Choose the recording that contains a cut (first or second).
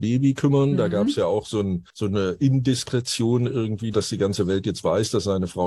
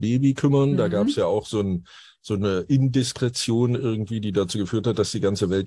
first